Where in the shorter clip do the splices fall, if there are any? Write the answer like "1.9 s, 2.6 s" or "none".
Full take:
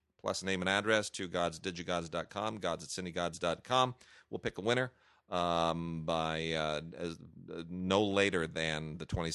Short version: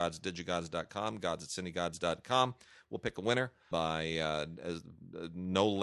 3.7 s

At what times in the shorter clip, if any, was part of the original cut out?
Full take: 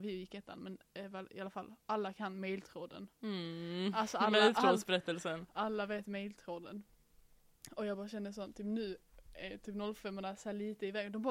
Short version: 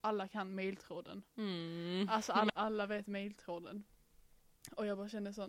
2.5 s

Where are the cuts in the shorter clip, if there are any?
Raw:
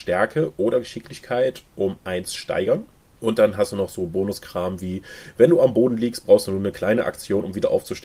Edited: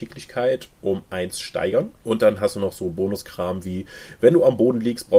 2.0 s

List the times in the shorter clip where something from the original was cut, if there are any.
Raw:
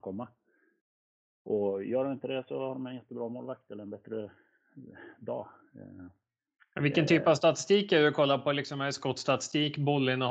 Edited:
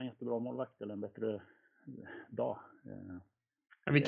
none

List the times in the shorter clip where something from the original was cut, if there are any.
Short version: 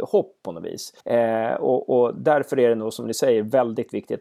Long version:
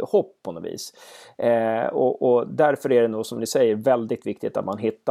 1.0 s

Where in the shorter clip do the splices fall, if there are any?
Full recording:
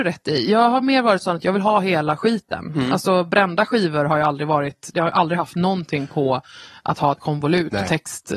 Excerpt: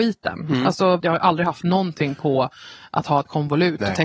1.0 s

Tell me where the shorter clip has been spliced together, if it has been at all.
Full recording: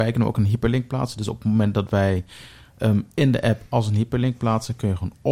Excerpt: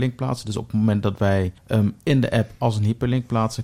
1.6 s

